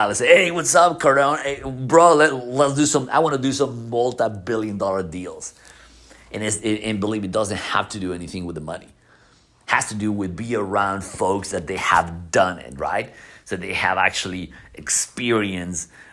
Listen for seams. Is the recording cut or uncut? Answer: uncut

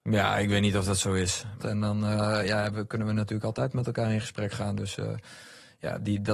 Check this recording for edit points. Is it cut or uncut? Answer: cut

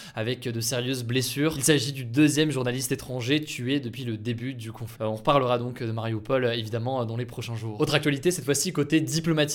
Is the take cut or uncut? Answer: cut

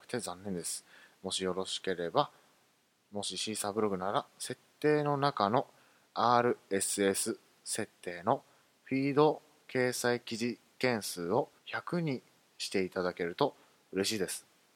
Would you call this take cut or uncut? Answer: cut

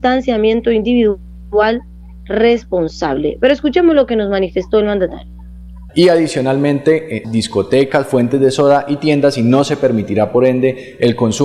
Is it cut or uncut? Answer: cut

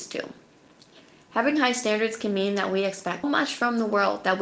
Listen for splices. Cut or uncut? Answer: cut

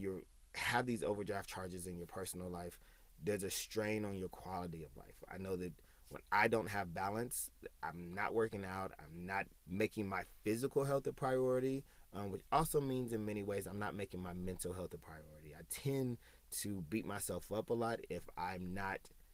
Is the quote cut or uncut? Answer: cut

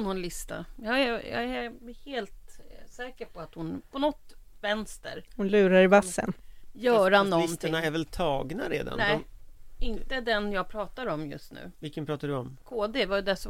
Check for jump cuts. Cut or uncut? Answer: cut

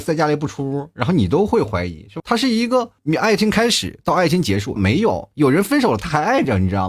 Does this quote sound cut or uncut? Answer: cut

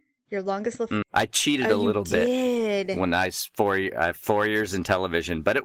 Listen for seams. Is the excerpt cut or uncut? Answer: cut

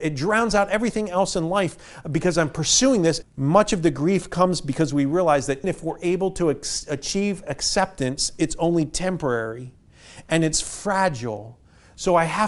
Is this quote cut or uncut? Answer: cut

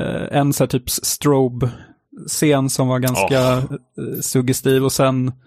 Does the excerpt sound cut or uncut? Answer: uncut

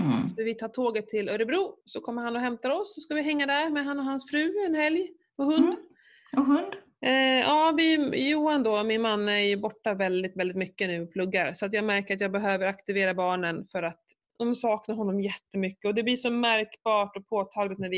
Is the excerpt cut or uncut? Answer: cut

